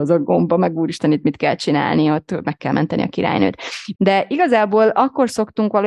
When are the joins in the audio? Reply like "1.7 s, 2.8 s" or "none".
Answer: 3.9 s